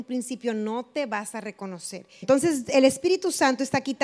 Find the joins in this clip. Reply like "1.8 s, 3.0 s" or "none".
2.2 s